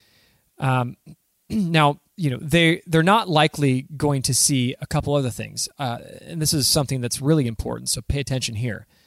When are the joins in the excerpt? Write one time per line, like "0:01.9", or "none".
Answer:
none

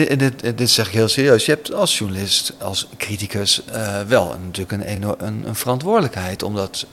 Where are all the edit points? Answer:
none

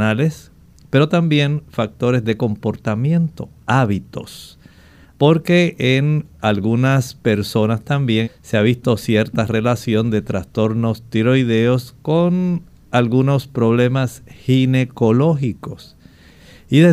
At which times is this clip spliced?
0:05.1
0:08.2

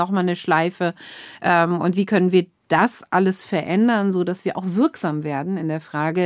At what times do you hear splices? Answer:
none

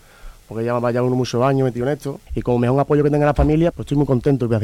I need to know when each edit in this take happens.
0:02.3
0:03.7

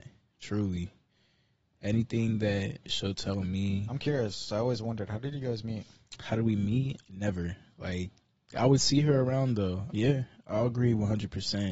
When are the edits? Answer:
0:07.0
0:09.9

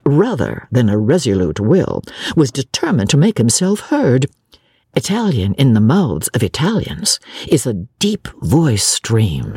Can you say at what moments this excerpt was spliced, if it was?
0:04.8

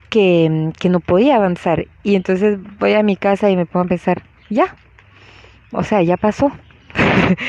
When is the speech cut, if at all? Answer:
none

